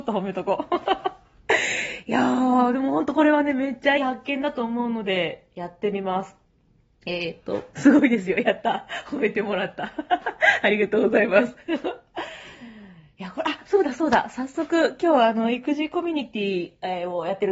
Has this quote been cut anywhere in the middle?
yes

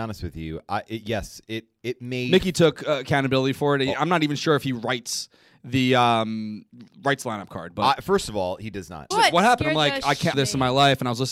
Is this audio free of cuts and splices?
no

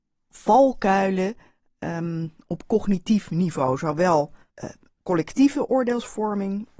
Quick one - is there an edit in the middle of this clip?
no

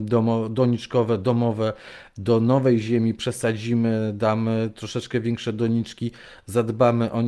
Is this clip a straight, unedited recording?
yes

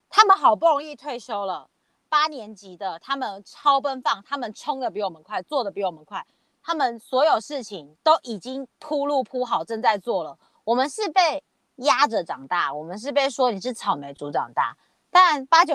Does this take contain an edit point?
no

